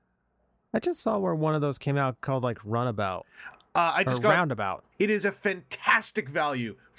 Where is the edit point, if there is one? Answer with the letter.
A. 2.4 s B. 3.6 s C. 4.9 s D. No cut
C